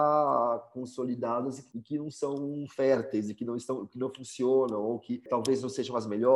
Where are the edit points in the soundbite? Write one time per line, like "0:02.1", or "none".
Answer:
none